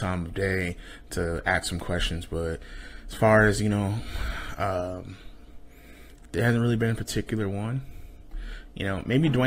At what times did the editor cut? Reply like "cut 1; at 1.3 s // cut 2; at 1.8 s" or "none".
none